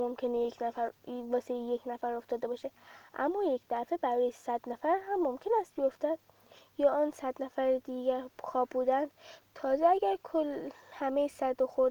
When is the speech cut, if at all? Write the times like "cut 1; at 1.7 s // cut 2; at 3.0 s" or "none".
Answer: none